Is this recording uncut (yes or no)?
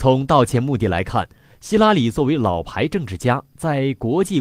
yes